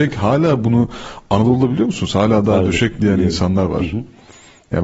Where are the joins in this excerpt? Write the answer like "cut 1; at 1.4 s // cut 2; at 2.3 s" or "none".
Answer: none

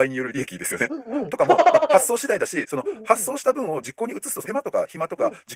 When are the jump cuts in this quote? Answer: cut 1; at 4.4 s

